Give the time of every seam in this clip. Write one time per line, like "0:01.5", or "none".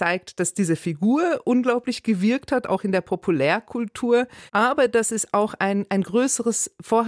0:04.5